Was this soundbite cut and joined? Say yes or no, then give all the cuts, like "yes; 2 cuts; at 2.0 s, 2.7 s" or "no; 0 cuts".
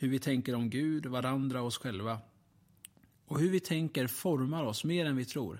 no; 0 cuts